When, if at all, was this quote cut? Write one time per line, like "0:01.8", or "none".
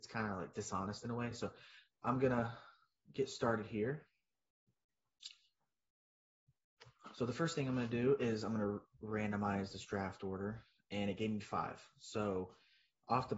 none

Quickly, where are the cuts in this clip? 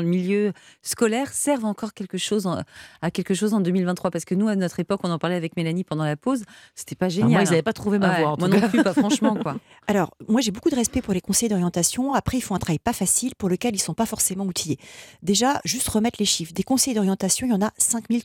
none

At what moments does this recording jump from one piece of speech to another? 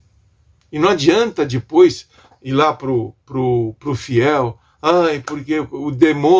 none

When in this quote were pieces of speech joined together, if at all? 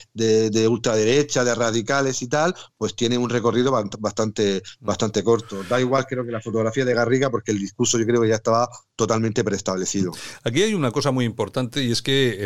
none

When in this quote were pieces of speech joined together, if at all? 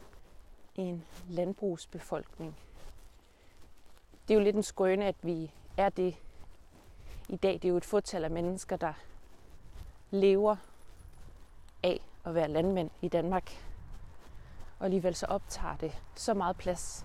none

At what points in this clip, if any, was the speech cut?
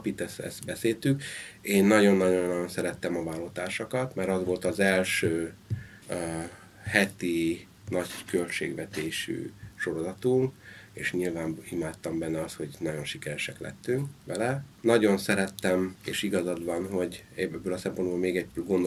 0:06.0
0:16.0

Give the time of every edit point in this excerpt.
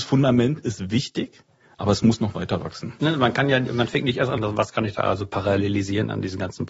0:03.0
0:04.4

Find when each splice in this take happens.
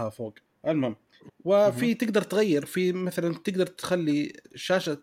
0:01.3

